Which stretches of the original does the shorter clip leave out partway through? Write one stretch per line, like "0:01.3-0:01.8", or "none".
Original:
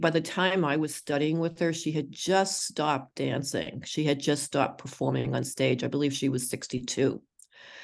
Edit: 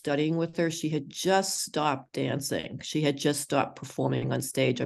none